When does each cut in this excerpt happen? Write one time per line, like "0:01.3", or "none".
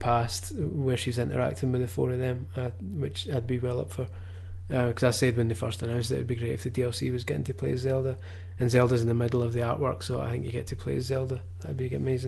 none